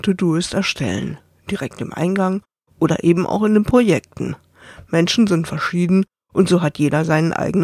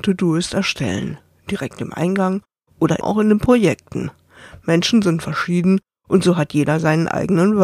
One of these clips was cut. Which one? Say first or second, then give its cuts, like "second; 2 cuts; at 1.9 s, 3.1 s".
second; 1 cut; at 3.0 s